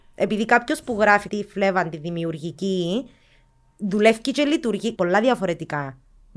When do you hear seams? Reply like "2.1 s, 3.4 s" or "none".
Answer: 1.3 s, 5.0 s